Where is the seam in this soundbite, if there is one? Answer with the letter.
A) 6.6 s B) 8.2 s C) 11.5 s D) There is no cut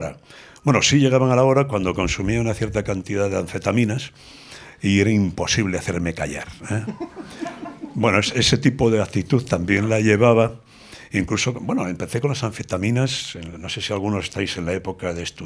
D